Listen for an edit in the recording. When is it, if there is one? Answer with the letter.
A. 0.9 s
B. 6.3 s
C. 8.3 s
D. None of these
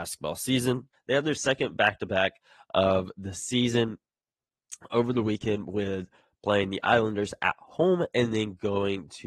A